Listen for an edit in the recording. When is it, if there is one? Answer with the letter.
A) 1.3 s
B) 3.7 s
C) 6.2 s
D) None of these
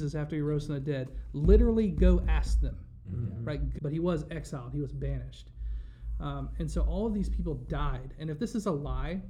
B